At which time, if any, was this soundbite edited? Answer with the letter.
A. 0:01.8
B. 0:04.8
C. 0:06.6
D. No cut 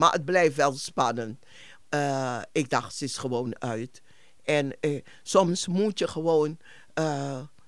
A